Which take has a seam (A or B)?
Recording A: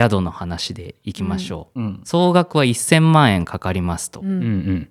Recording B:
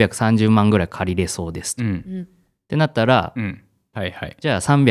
B